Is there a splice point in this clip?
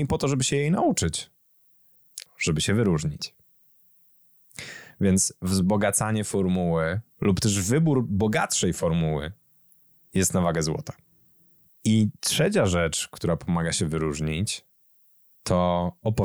yes; 2 cuts; at 2.2 s, 7.1 s

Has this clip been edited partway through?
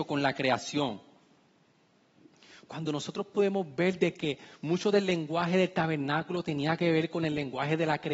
no; 0 cuts

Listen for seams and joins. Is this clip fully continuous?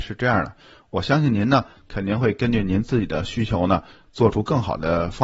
yes; 0 cuts

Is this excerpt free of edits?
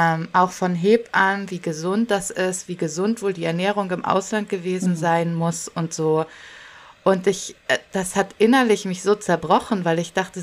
yes; 0 cuts

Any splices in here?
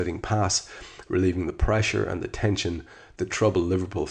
yes; 1 cut; at 1.0 s

